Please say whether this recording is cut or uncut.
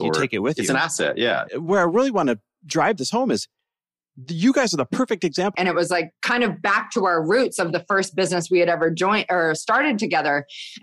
cut